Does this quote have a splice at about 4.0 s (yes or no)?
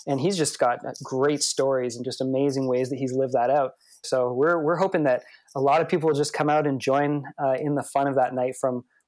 yes